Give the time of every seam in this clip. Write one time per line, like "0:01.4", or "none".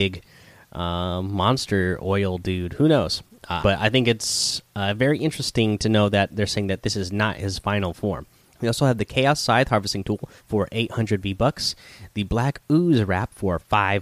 0:03.6
0:08.5
0:10.4